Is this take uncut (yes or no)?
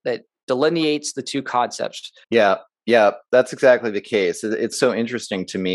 no